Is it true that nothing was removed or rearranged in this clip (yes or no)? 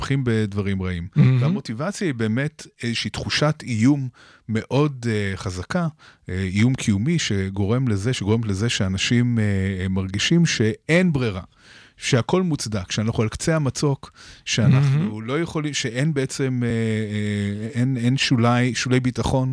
yes